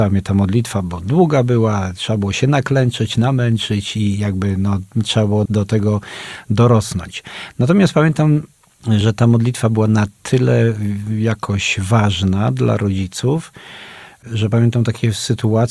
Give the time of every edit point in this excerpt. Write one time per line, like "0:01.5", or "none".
0:05.5